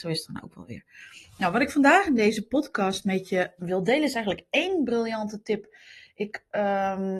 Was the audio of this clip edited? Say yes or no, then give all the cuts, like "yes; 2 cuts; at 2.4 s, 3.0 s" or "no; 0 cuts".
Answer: yes; 1 cut; at 3.6 s